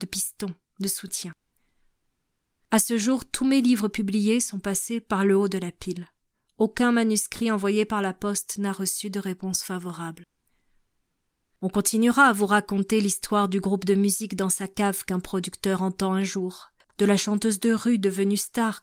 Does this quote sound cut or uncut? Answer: uncut